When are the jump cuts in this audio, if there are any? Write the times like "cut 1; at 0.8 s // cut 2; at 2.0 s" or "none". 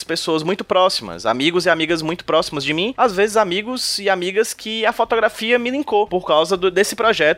none